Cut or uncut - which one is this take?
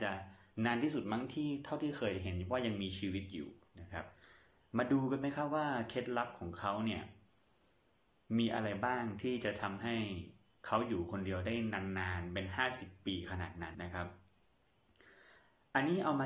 cut